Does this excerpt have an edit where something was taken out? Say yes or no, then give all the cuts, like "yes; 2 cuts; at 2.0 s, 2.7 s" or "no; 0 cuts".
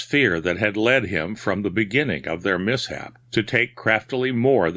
yes; 1 cut; at 3.2 s